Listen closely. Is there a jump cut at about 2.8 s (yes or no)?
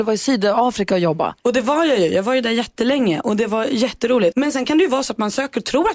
no